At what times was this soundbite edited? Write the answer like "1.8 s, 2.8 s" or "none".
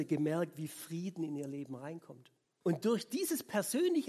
2.6 s